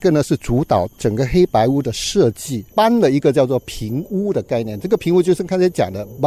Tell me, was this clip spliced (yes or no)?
yes